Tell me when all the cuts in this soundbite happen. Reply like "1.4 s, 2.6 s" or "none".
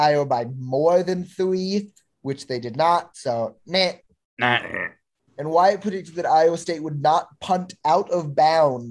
none